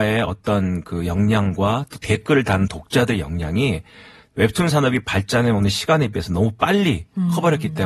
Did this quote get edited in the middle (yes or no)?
no